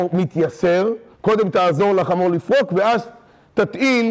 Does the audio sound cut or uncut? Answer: cut